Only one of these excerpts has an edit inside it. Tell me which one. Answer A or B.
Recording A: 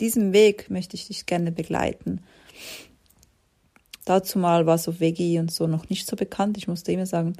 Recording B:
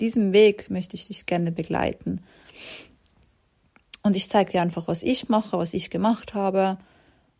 A